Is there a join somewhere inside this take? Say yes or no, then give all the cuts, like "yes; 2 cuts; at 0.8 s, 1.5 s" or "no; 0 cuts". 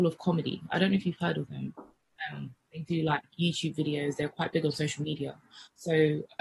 no; 0 cuts